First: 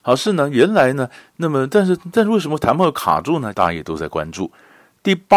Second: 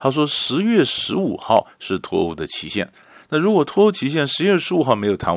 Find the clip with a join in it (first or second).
first